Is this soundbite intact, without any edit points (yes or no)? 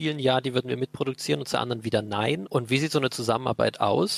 no